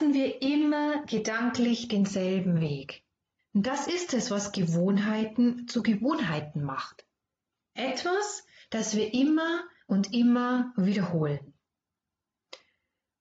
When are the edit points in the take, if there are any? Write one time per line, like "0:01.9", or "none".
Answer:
0:03.4